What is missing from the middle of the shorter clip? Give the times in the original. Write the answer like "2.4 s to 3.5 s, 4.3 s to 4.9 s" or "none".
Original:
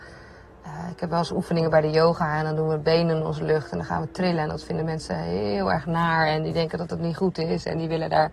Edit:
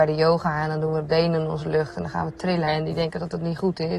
4.4 s to 6.3 s